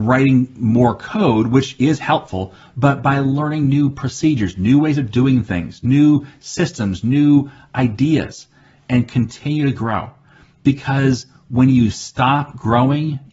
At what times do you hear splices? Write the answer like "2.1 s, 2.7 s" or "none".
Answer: none